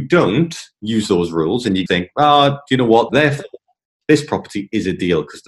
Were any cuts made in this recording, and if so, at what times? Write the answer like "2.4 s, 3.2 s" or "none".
1.9 s, 3.1 s